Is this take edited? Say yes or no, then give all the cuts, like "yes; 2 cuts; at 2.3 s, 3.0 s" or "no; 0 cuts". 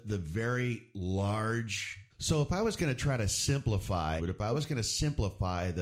yes; 2 cuts; at 2.1 s, 4.2 s